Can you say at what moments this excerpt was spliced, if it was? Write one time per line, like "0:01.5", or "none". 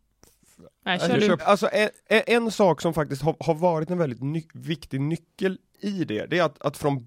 0:01.4